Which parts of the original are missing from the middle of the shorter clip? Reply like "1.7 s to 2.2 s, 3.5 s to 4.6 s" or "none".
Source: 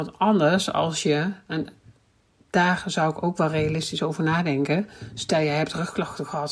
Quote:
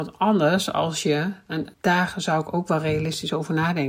1.7 s to 2.4 s